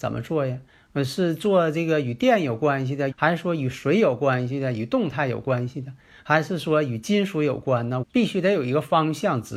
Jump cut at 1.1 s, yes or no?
no